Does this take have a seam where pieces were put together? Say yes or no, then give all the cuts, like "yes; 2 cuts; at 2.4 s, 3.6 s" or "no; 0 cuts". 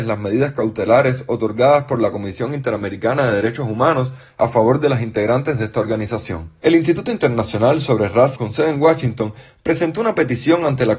yes; 2 cuts; at 6.6 s, 8.3 s